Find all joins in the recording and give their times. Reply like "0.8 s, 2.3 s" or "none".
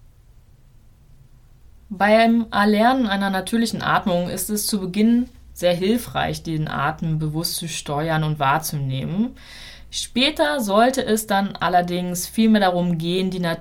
none

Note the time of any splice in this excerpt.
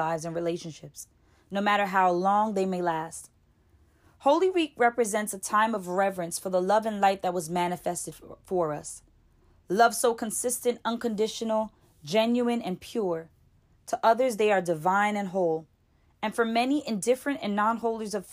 13.8 s

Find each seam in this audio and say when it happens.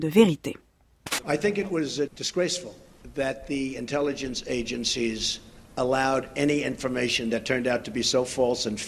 2.1 s

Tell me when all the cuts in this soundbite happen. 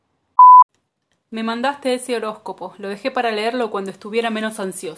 none

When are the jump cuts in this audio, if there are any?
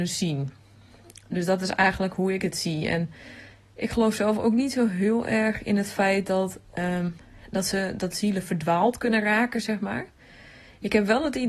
none

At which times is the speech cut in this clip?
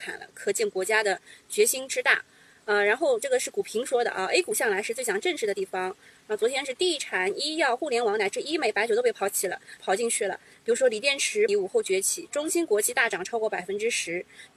9.8 s, 11.5 s

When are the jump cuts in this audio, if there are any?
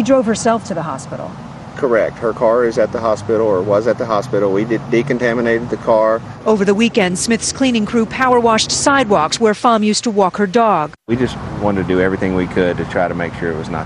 none

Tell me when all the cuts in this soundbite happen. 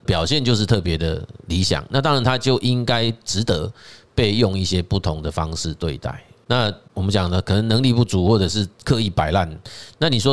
none

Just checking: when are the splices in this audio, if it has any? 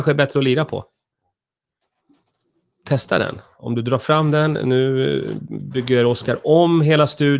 none

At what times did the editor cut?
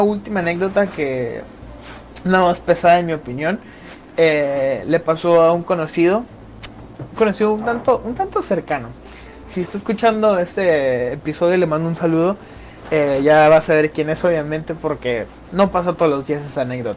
none

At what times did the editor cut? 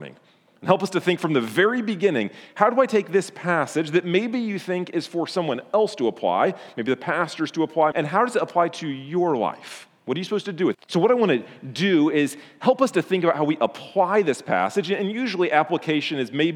7.9 s, 10.7 s

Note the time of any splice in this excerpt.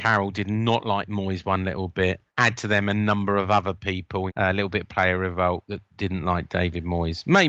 2.3 s, 4.3 s

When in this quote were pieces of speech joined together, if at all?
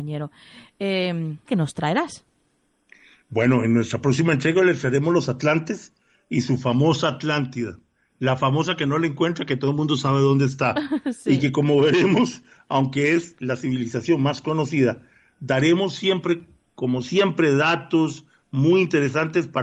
1.5 s

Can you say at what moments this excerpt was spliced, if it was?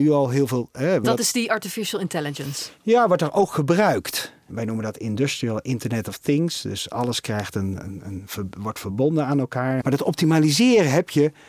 1.0 s, 7.8 s, 9.8 s

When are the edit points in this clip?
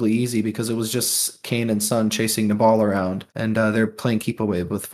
3.3 s

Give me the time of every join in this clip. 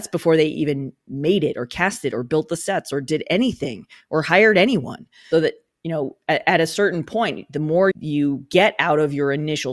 5.3 s, 7.9 s

